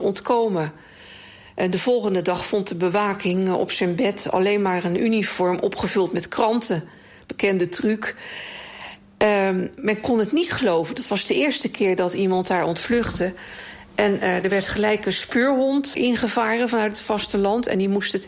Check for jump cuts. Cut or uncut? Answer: cut